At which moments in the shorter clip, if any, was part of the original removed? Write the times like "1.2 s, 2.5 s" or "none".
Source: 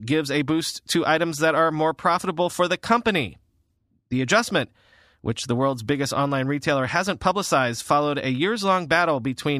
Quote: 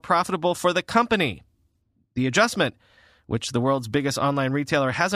none